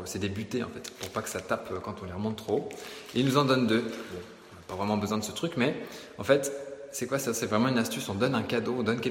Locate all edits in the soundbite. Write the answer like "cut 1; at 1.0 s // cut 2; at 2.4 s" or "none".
none